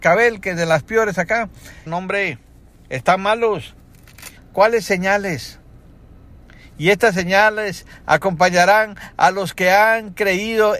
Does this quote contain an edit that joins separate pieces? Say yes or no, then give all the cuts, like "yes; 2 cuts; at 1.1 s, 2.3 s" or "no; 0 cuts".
yes; 2 cuts; at 1.9 s, 4.4 s